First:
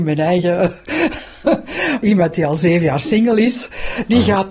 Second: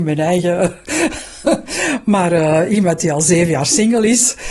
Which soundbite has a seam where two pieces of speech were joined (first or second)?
first